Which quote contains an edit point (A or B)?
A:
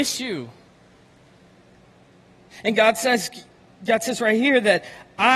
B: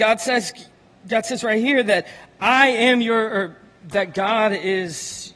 B